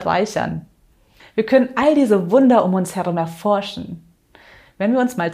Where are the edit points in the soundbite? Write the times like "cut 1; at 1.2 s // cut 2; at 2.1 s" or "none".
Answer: cut 1; at 1.2 s